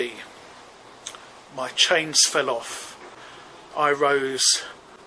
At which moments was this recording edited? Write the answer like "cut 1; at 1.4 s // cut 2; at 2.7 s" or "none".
cut 1; at 3.7 s